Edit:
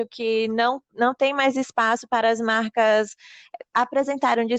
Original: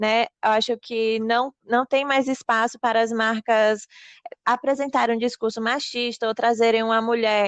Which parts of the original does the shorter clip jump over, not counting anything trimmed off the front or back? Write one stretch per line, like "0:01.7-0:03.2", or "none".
none